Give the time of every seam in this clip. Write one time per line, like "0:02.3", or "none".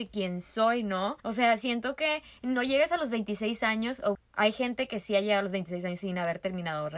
0:01.2
0:04.1